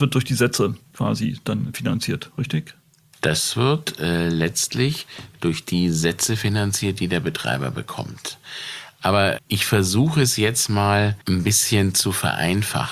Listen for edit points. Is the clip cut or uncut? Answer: cut